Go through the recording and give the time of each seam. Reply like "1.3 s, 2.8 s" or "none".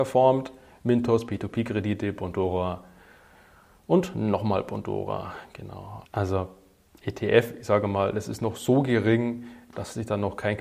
6.1 s